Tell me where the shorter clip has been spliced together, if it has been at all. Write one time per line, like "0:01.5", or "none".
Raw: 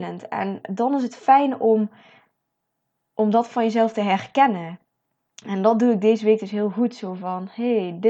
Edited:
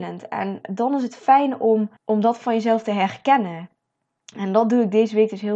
0:02.0